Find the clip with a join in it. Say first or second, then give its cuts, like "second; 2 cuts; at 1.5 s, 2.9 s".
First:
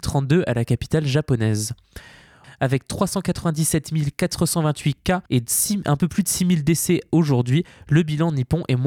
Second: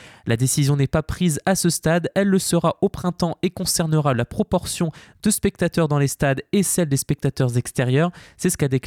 first; 2 cuts; at 2.4 s, 5.3 s